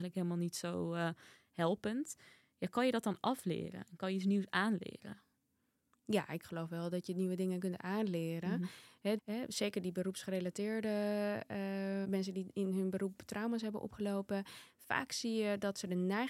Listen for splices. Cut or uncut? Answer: cut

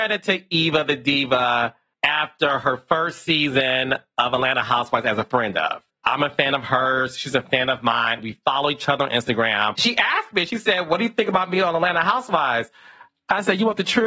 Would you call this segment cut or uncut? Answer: uncut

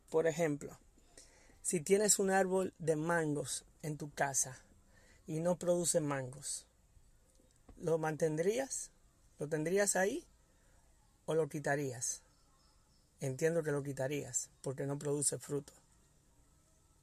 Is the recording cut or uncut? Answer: uncut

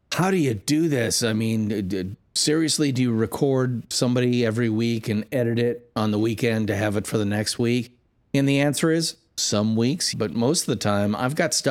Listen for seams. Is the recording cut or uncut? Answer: cut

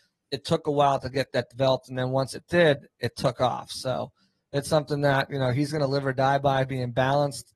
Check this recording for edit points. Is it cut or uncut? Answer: uncut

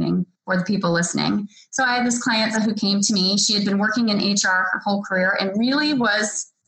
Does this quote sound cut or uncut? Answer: cut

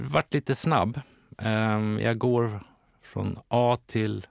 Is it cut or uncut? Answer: uncut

